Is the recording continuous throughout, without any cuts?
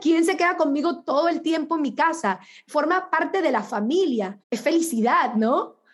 no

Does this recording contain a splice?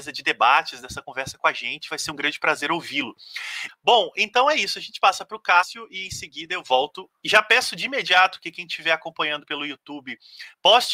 yes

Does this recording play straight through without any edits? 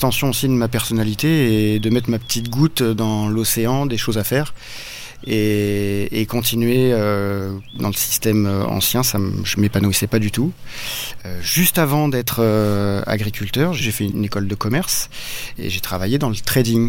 yes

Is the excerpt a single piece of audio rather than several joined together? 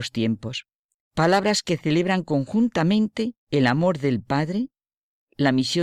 no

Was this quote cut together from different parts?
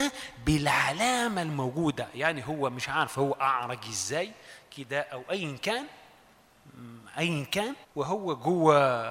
yes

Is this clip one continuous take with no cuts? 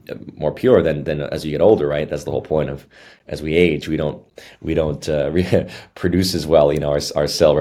yes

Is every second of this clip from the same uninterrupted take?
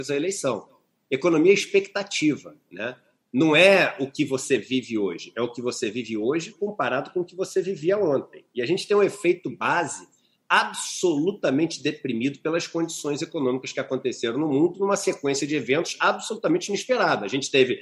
yes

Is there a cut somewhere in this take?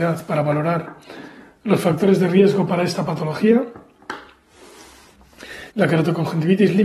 yes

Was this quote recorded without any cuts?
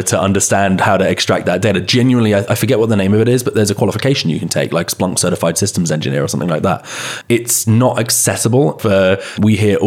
no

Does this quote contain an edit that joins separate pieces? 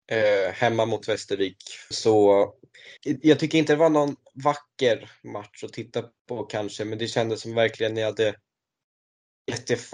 yes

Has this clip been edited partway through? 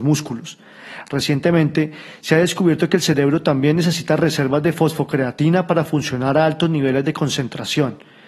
no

